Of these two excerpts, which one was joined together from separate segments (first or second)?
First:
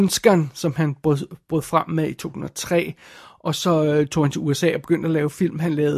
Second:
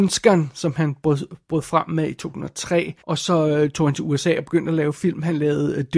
second